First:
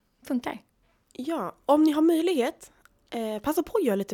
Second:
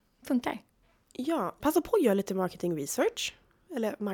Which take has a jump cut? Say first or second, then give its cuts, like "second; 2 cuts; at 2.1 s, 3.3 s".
second; 1 cut; at 1.6 s